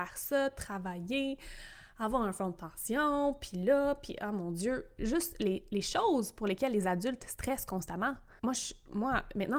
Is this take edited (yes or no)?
yes